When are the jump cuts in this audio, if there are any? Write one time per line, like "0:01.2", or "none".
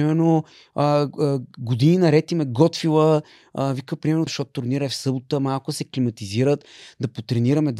0:04.3

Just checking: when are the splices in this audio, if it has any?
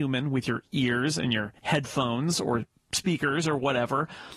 0:01.6

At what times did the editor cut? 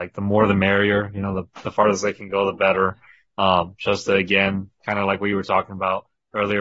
none

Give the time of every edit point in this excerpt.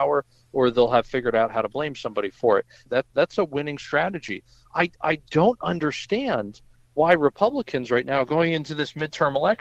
0:02.9

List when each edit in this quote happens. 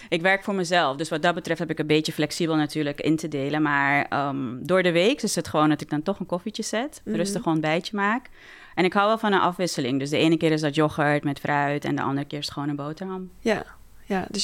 none

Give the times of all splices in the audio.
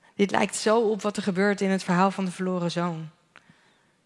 none

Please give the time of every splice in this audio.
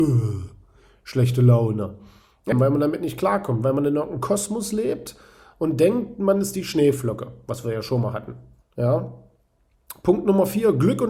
0:02.5
0:08.6

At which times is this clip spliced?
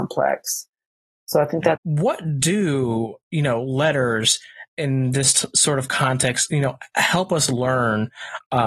0:01.8

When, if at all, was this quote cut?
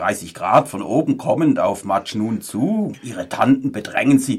0:02.9

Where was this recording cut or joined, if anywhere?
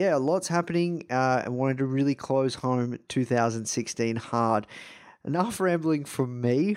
none

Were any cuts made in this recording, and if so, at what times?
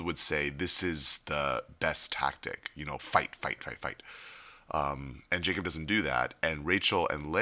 0:03.6
0:05.3

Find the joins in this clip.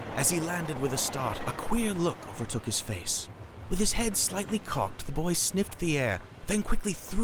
none

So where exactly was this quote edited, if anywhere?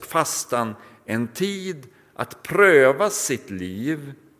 none

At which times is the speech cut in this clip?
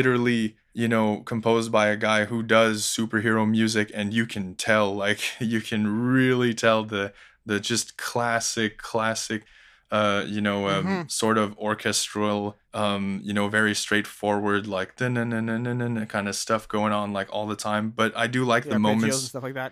none

